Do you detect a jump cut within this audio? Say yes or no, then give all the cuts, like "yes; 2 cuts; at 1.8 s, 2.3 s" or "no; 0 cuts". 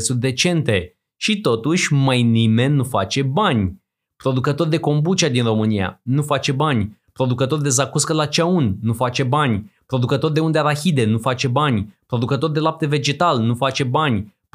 no; 0 cuts